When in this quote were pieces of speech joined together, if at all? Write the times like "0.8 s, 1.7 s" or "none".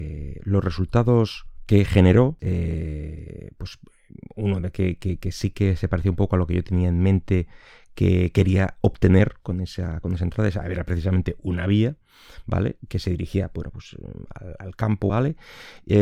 2.4 s, 15.1 s